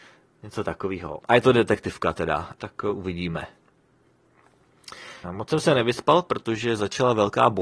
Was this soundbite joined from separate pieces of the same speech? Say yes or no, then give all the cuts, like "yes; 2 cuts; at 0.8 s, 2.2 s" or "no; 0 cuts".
yes; 3 cuts; at 1.2 s, 2.5 s, 5.2 s